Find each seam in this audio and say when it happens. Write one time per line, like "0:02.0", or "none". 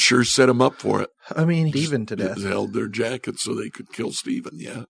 0:01.7

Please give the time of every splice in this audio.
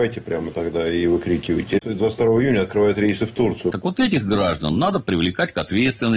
0:03.7

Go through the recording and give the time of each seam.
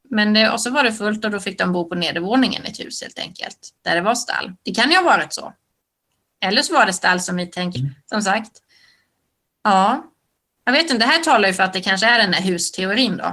0:07.8

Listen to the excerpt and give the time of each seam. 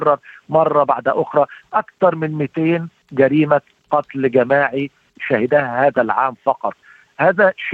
none

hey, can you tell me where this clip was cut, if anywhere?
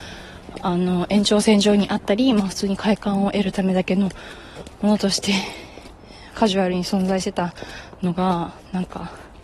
none

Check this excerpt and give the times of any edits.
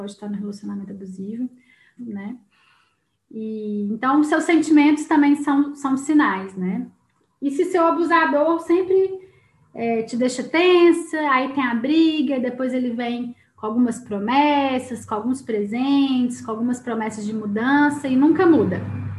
0:02.0

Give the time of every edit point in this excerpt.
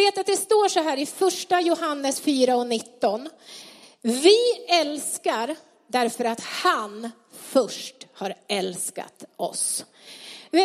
none

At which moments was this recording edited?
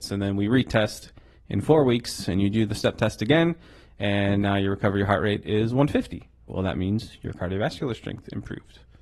none

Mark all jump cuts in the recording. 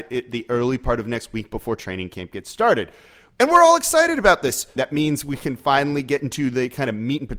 0:04.8

